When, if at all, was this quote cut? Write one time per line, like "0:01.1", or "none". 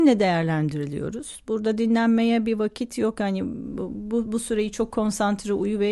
none